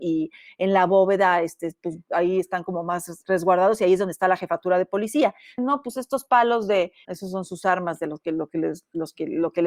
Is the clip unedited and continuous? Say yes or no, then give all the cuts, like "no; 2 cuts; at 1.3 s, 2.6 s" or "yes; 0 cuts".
no; 2 cuts; at 5.6 s, 7.0 s